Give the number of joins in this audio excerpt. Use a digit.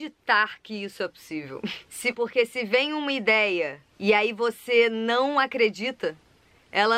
2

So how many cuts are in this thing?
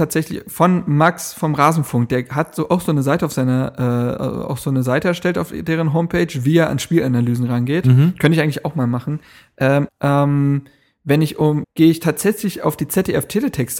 2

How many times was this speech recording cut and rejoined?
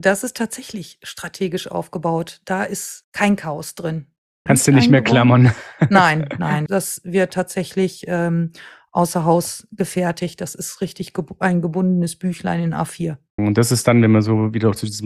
3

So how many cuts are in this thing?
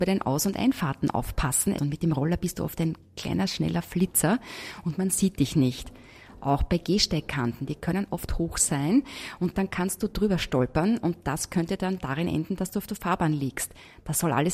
1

